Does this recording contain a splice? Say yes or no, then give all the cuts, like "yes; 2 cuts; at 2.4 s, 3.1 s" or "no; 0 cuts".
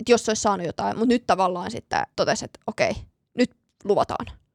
yes; 1 cut; at 2.1 s